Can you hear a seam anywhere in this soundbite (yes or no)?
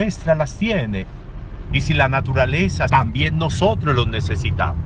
yes